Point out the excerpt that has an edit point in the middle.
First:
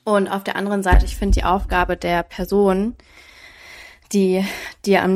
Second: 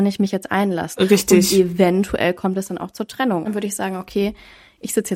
second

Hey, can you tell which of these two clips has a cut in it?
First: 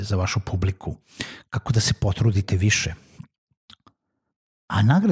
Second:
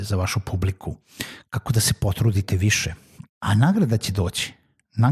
second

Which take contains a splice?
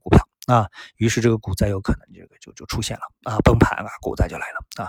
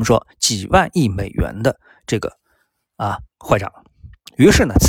second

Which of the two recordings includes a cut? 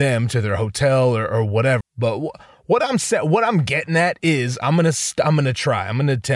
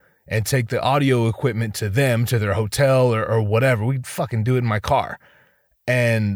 first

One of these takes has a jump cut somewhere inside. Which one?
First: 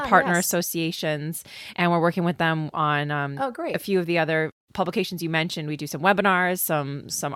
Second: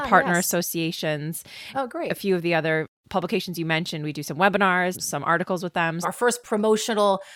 second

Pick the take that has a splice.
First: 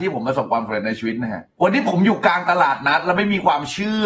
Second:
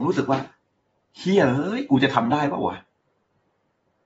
first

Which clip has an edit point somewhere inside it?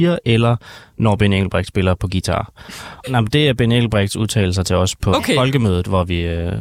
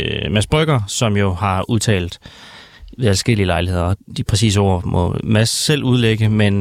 first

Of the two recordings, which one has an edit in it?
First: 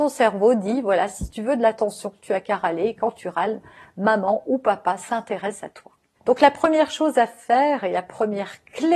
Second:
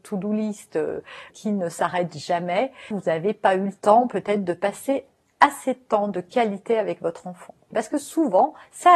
second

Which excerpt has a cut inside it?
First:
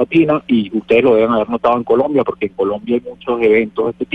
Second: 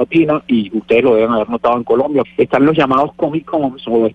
second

